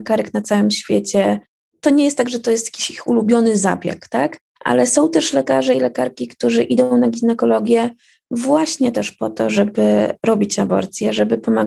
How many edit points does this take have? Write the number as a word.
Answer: zero